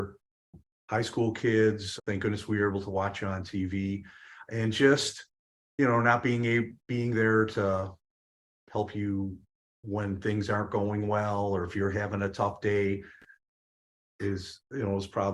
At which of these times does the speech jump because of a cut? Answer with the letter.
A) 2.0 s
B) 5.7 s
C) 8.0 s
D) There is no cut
A